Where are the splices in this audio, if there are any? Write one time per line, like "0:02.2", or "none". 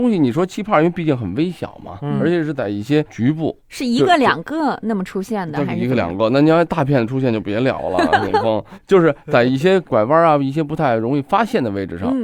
none